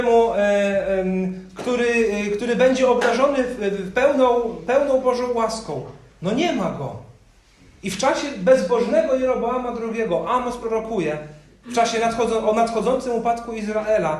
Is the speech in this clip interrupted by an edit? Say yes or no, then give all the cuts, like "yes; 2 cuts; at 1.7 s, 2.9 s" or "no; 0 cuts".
no; 0 cuts